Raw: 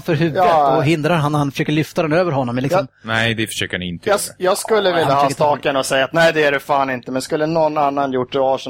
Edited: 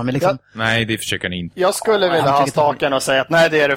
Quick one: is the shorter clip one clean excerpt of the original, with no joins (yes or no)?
no